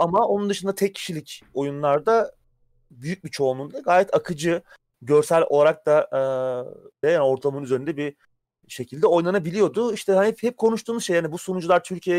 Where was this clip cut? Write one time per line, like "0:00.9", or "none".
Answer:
0:07.0